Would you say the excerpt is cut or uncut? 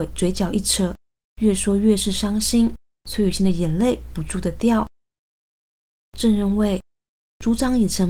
cut